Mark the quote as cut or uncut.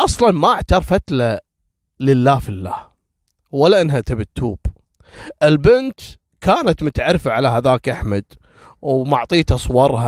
uncut